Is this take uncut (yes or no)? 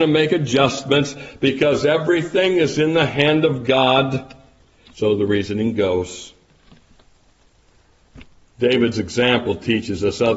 no